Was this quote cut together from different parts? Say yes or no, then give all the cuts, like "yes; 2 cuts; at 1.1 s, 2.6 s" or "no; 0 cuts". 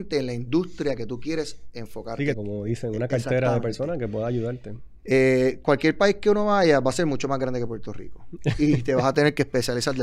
yes; 1 cut; at 2.3 s